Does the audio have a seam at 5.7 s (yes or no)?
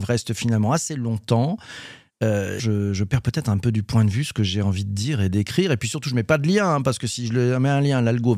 no